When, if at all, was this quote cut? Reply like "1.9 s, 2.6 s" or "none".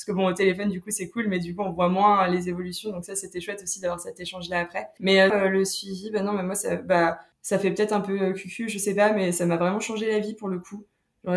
5.3 s